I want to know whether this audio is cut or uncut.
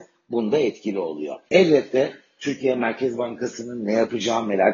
cut